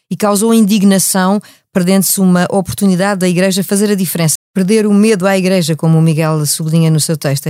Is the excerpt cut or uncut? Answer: cut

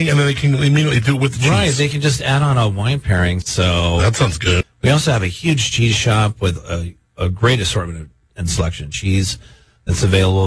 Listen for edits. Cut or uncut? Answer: cut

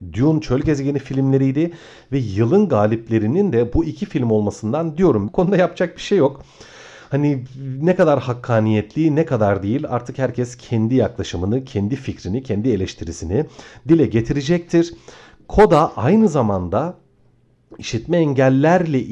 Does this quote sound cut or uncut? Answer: cut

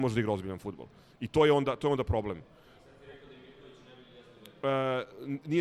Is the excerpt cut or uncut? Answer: uncut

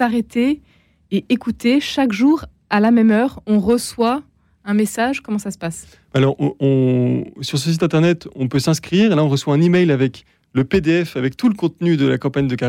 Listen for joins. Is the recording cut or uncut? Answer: uncut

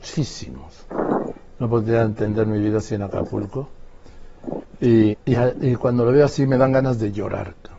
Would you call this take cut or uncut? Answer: cut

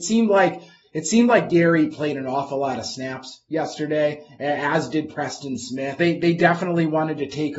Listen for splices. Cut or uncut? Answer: cut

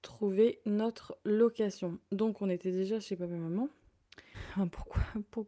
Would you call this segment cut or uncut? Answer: cut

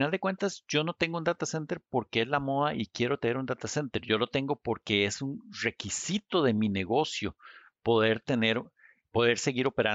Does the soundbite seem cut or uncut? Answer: uncut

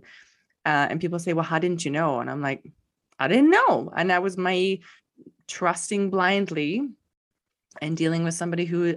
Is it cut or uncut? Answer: uncut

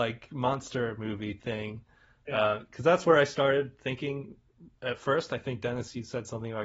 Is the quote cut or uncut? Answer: uncut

